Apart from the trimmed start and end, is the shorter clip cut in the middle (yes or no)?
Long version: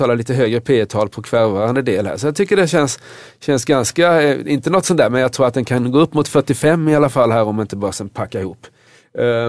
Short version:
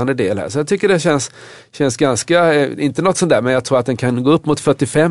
no